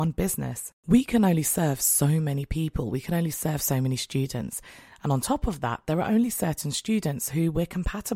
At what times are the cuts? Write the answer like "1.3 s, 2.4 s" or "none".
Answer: none

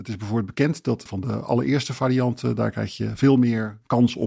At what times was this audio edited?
1.1 s

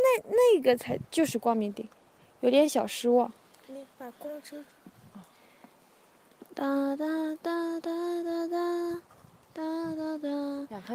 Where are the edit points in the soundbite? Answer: 3.9 s

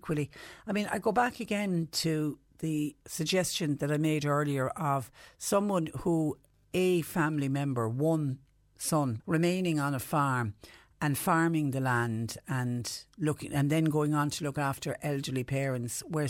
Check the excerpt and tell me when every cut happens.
3.0 s, 9.2 s

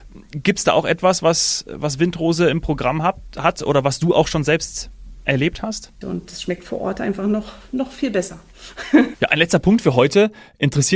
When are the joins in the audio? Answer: 6.0 s, 9.1 s

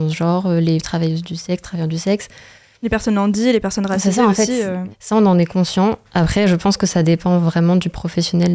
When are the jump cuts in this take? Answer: 4.9 s

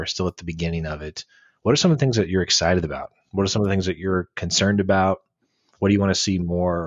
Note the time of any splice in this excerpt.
none

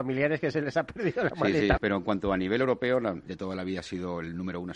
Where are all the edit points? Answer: 1.8 s, 3.3 s

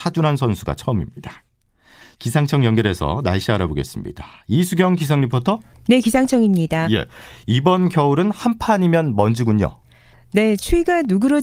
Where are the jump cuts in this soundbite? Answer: none

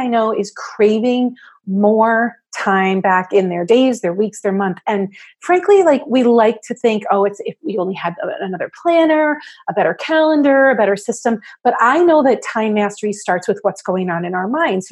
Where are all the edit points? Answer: none

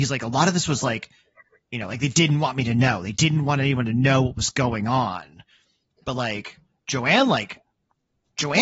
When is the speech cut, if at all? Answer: none

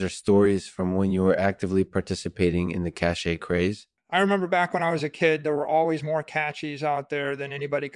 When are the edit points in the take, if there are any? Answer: 4.0 s

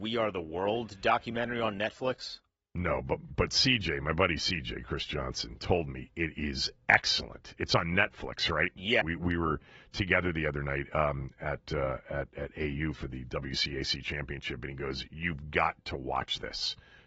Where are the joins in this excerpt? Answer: 9.0 s

